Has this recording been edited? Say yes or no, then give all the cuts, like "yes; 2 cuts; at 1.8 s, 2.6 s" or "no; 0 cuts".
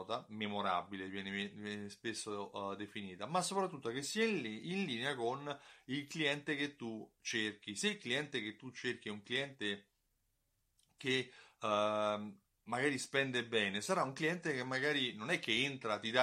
no; 0 cuts